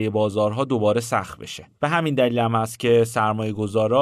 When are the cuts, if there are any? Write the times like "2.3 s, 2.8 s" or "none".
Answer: 1.7 s